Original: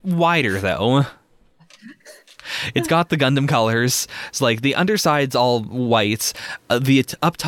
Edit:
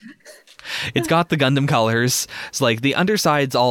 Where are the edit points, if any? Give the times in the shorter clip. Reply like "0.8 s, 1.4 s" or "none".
none